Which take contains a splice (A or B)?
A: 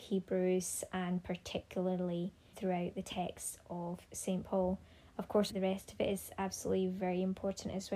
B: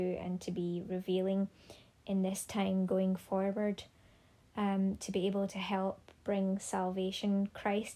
A